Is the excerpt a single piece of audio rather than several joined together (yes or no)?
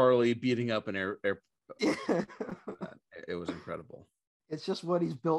no